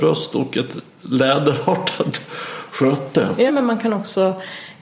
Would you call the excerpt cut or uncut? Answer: cut